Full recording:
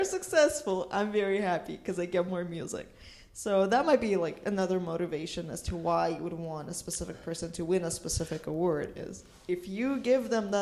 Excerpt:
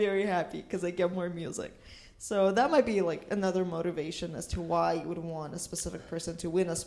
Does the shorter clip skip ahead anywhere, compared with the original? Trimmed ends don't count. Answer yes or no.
no